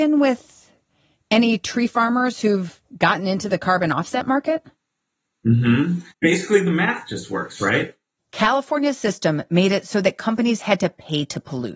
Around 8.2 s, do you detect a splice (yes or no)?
yes